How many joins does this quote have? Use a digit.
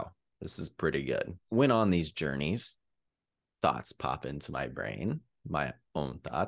1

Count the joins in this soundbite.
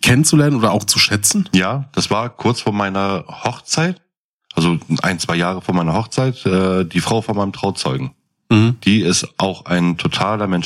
0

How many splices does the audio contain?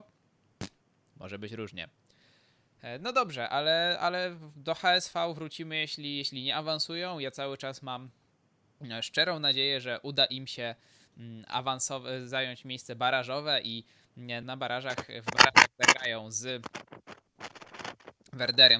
1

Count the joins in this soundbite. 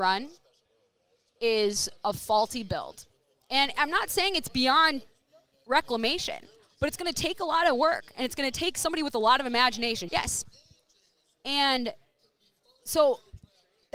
1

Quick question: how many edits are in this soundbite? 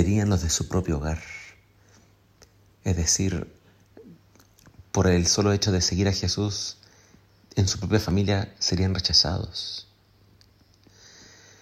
0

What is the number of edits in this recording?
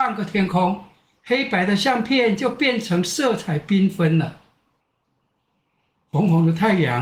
1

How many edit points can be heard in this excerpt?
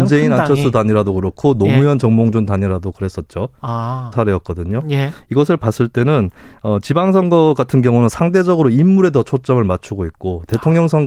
1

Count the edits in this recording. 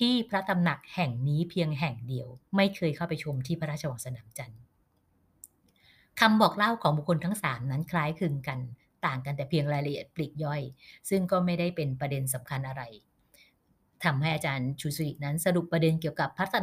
1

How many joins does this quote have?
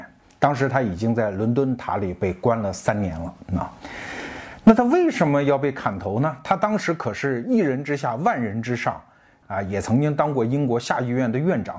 1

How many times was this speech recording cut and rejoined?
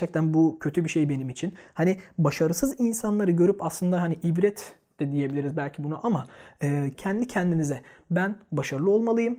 1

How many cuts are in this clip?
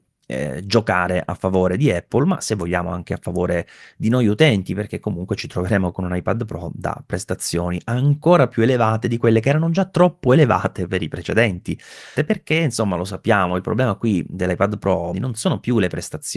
2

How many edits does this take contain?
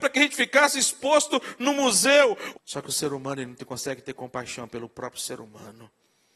1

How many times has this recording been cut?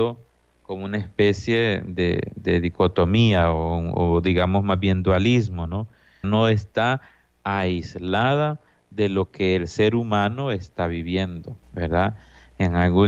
2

